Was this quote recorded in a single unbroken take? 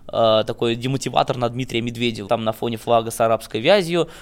no; 1 cut; at 2.3 s

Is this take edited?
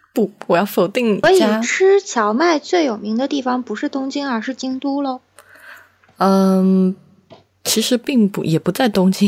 yes; 1 cut; at 1.2 s

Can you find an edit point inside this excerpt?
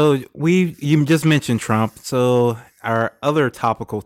no; 0 cuts

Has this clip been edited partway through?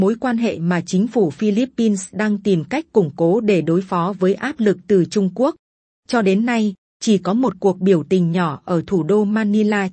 yes; 1 cut; at 6.8 s

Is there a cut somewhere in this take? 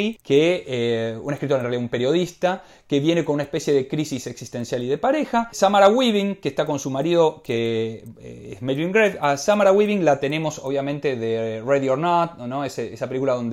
no; 0 cuts

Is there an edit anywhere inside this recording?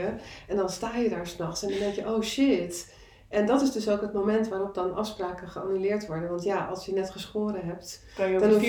no; 0 cuts

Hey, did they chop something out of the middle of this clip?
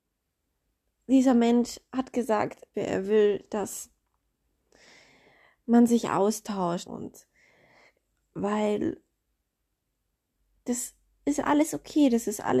yes; 2 cuts; at 2.7 s, 6.9 s

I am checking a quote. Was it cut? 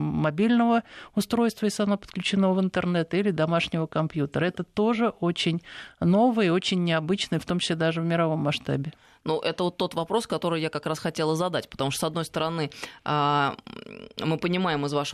no; 0 cuts

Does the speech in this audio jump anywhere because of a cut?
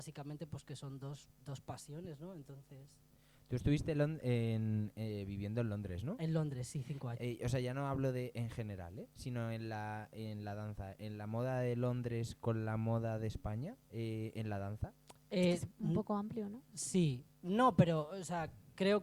yes; 2 cuts; at 7.2 s, 13.8 s

